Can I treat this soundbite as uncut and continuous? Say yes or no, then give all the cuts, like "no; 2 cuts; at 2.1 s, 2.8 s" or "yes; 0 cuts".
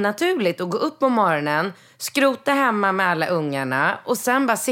yes; 0 cuts